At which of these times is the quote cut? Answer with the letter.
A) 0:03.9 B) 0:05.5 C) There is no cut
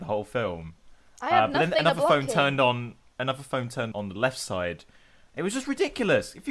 A